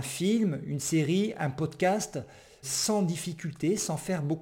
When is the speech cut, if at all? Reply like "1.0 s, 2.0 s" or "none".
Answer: 2.6 s